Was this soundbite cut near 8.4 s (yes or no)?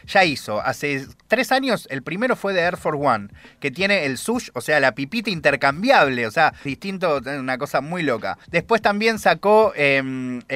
yes